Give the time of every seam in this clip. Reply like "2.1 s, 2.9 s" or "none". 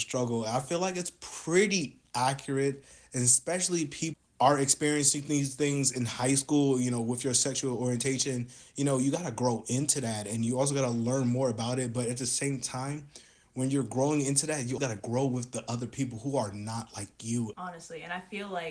14.8 s, 17.5 s

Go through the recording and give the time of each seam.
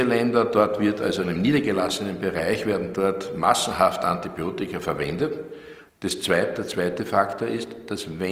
1.2 s, 5.9 s

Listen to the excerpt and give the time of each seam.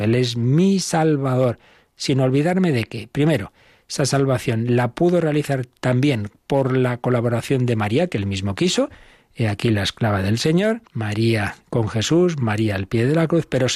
10.9 s

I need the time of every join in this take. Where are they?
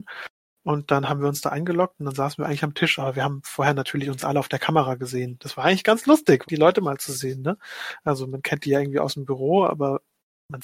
6.4 s

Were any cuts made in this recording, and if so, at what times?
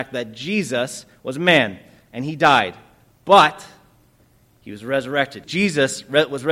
5.4 s

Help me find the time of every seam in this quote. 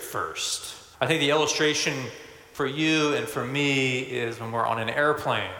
0.9 s

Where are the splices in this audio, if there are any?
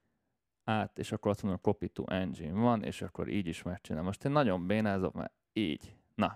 none

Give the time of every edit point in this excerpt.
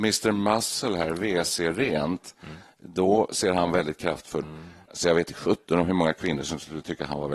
4.4 s

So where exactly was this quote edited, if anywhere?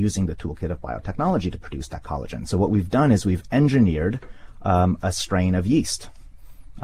none

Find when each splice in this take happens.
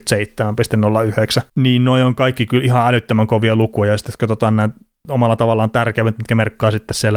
1.5 s

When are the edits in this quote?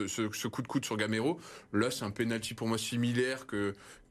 none

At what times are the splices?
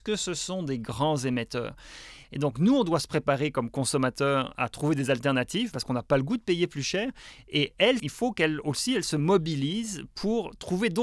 2.2 s, 8.0 s

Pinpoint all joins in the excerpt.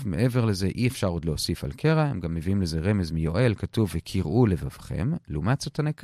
none

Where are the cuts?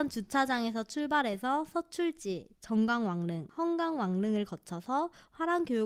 2.6 s

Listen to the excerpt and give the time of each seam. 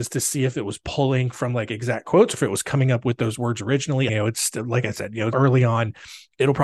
4.1 s, 5.3 s

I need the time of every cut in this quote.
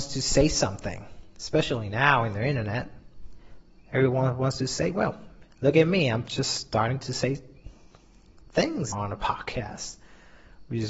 5.5 s, 8.9 s

